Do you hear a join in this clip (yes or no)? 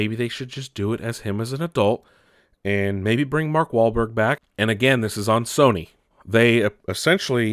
yes